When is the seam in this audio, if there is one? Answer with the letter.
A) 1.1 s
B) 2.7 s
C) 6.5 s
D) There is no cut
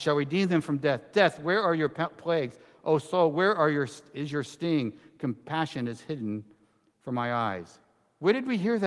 D